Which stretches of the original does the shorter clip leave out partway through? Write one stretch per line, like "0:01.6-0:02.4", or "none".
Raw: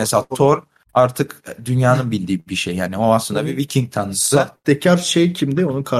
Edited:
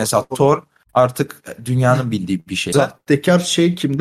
0:02.7-0:04.3